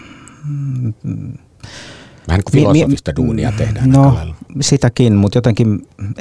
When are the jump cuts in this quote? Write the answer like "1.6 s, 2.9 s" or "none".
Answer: none